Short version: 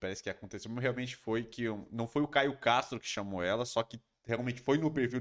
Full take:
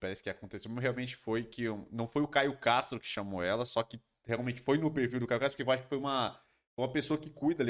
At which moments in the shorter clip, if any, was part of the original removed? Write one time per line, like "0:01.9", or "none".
none